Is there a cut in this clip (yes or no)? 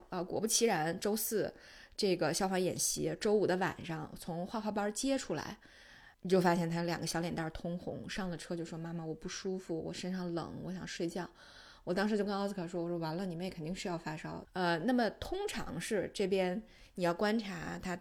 yes